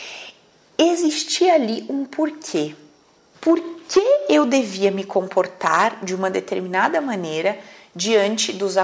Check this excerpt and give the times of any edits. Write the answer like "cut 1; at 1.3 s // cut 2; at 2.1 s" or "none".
cut 1; at 3.3 s